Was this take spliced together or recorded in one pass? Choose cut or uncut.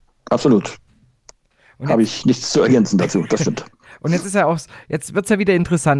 uncut